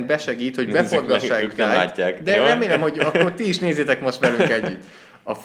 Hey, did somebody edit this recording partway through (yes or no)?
no